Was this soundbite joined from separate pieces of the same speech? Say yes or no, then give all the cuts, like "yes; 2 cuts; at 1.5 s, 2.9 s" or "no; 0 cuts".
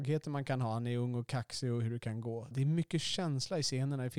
yes; 1 cut; at 2.5 s